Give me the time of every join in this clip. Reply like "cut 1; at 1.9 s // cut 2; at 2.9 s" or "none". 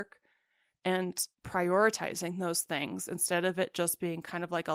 cut 1; at 1.3 s